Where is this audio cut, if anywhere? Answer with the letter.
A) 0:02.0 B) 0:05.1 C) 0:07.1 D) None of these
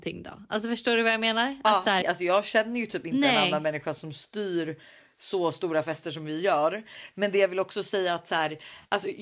A